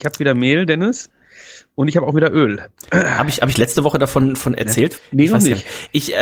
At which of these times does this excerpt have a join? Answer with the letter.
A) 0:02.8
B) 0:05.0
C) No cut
B